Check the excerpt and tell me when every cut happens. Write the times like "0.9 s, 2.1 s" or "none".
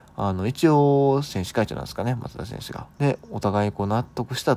2.9 s